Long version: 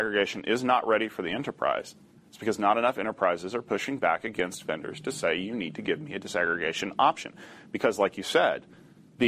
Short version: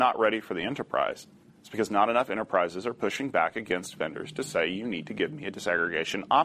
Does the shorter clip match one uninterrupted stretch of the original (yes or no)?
yes